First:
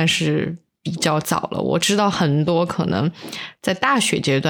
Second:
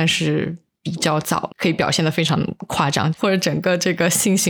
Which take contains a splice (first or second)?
second